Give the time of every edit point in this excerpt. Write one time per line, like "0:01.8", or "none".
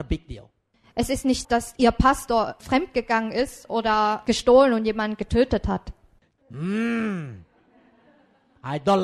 0:01.4
0:06.4